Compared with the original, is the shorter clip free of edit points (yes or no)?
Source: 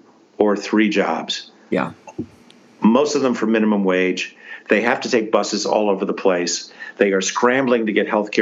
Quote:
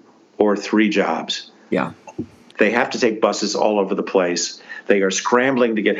no